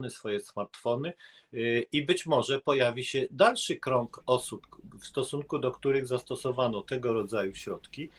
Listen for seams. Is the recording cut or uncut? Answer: uncut